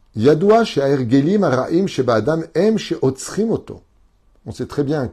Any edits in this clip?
no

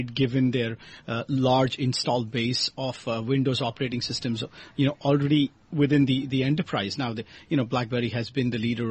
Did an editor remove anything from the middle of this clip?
no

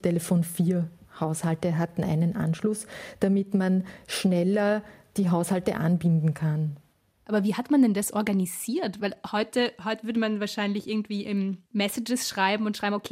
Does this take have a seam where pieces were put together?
yes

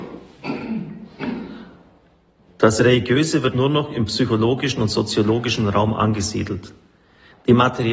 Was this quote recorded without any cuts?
no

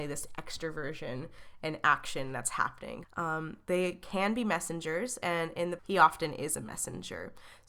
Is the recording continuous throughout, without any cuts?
no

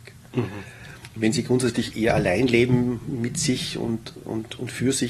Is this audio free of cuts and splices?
no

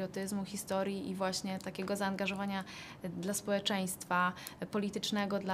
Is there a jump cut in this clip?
no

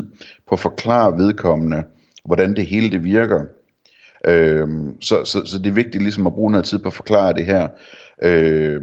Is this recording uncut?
no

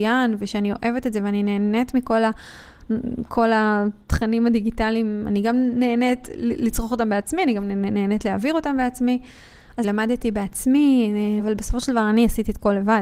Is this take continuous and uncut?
no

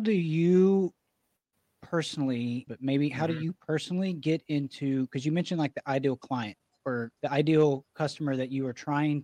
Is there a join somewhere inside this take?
yes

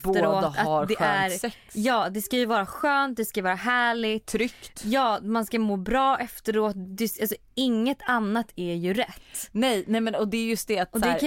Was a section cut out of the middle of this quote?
no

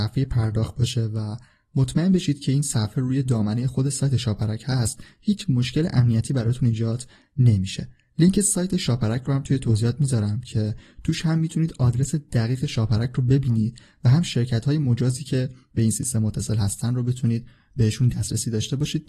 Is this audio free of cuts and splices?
yes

